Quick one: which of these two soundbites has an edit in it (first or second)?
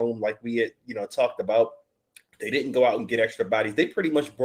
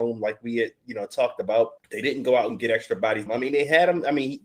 second